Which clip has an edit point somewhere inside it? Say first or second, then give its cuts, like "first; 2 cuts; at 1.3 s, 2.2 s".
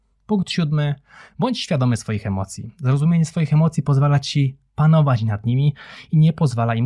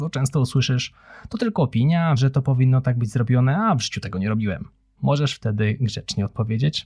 second; 1 cut; at 2.2 s